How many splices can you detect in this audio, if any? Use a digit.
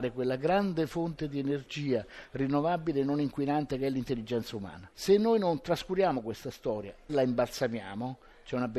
2